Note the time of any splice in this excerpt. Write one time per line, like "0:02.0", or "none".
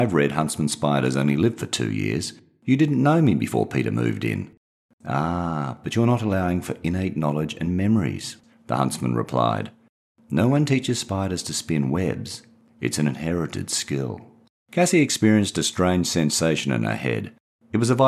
0:14.6